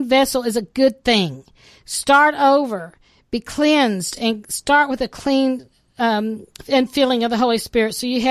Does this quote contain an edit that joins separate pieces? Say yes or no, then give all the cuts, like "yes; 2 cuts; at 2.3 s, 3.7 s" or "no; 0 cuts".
no; 0 cuts